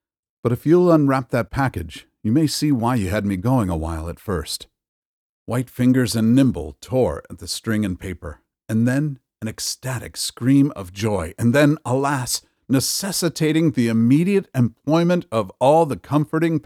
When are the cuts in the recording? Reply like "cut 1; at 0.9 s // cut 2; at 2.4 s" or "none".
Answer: cut 1; at 12.6 s